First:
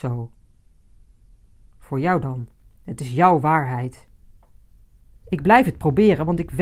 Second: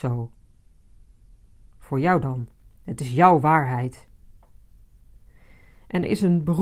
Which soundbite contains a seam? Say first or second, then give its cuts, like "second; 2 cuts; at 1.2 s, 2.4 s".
first; 1 cut; at 5.2 s